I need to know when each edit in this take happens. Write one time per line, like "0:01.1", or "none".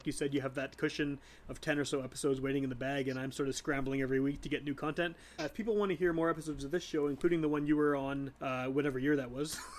0:05.4
0:08.4